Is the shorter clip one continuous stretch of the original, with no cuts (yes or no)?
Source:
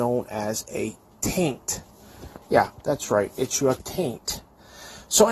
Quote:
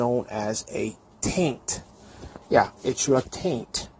no